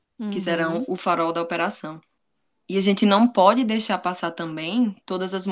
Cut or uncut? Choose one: uncut